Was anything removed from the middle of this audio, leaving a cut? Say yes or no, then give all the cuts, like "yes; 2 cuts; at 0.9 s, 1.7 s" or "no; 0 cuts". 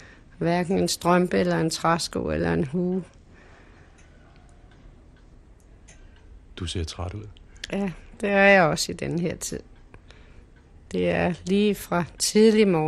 yes; 1 cut; at 10.9 s